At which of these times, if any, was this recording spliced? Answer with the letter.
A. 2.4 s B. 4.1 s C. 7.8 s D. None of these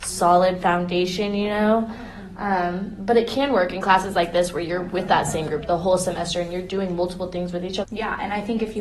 C